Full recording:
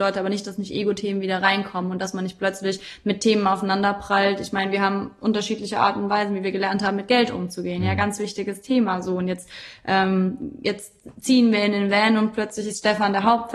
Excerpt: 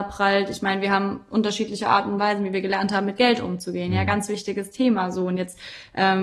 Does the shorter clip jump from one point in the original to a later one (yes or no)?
no